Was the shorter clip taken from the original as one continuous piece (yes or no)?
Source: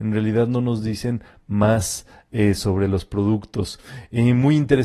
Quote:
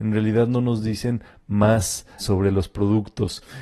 no